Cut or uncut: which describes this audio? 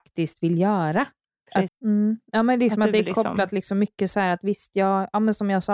cut